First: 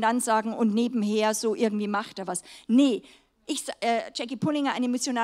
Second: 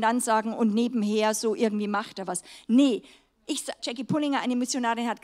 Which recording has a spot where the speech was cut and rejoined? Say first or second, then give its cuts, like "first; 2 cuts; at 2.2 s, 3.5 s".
second; 1 cut; at 3.8 s